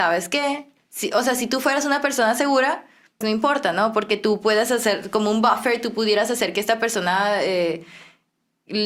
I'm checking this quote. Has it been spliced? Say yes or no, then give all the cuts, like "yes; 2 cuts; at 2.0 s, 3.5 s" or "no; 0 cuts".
yes; 1 cut; at 3.2 s